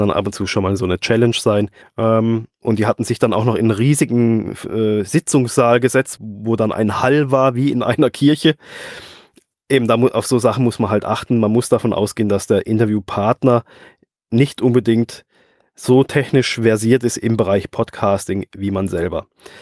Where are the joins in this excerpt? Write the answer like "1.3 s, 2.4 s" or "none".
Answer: 1.8 s, 6.2 s